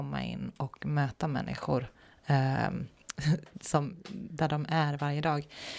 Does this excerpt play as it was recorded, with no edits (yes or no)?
yes